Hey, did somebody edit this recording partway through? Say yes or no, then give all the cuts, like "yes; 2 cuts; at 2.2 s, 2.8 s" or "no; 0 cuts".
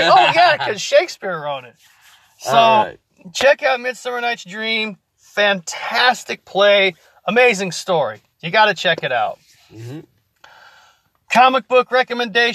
no; 0 cuts